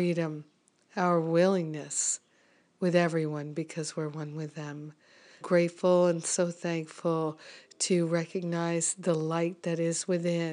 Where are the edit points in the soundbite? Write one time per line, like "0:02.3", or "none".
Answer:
0:05.4